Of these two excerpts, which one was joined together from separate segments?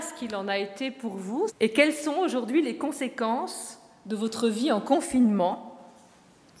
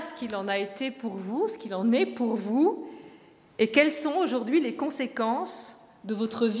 first; 1 cut; at 1.5 s

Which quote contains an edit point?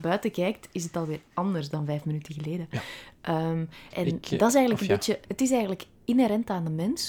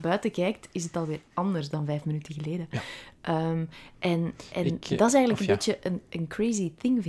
first; 2 cuts; at 3.9 s, 5.2 s

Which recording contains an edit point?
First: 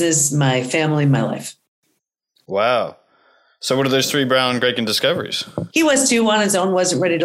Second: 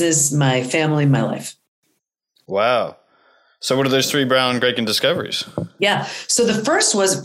first; 1 cut; at 5.7 s

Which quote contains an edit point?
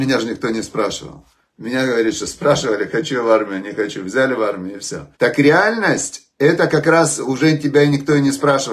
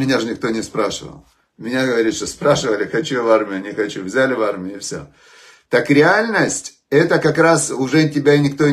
first; 1 cut; at 5.1 s

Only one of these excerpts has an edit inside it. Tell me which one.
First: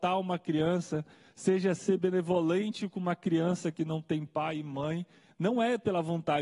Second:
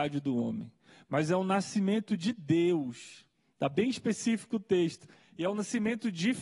second; 1 cut; at 5.2 s

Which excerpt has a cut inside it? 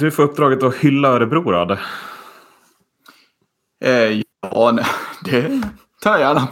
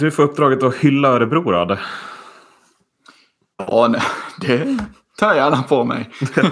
second; 1 cut; at 3.5 s

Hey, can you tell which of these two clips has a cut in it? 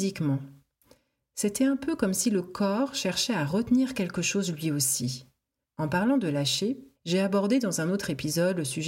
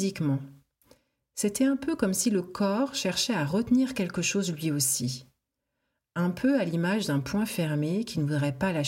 first; 2 cuts; at 5.6 s, 6.9 s

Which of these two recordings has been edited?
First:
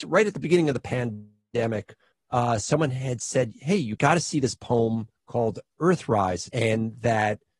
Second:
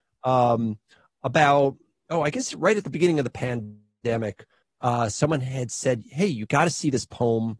first; 1 cut; at 6.5 s

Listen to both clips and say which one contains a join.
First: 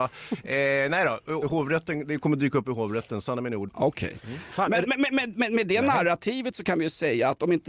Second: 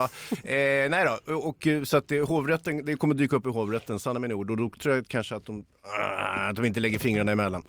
first; 2 cuts; at 1.4 s, 3.7 s

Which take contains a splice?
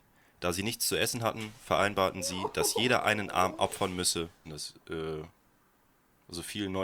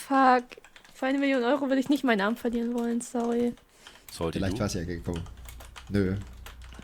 first; 1 cut; at 4.4 s

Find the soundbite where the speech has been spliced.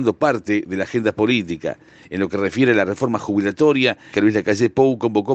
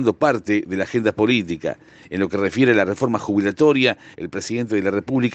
first; 1 cut; at 4.1 s

